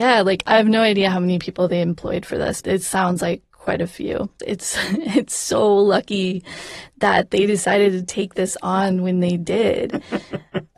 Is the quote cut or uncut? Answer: cut